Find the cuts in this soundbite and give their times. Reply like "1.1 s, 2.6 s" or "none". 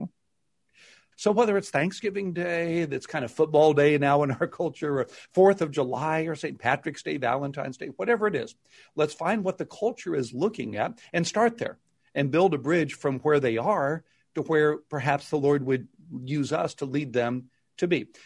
1.1 s